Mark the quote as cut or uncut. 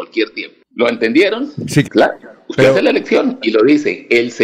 cut